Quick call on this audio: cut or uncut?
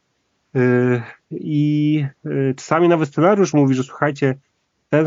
uncut